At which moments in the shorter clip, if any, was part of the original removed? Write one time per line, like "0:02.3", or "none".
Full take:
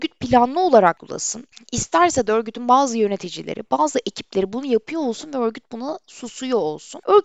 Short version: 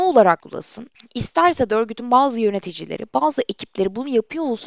none